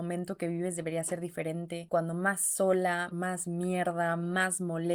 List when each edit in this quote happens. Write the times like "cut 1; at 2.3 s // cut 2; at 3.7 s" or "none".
cut 1; at 1.9 s // cut 2; at 3.1 s